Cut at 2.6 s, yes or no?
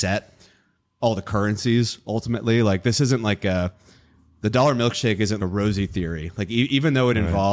no